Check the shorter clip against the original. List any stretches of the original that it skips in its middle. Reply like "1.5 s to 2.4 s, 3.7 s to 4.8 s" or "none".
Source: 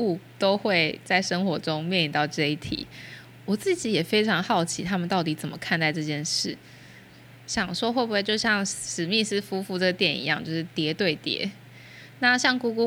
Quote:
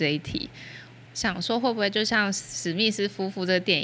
3.4 s to 7.4 s